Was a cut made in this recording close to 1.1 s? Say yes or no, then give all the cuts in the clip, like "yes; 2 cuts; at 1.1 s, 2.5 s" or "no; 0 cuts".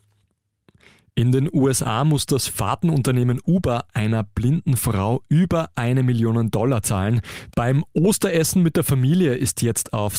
no; 1 cut; at 7.5 s